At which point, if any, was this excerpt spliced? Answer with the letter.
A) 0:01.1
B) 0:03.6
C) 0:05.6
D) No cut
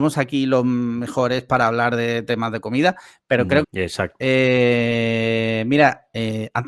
B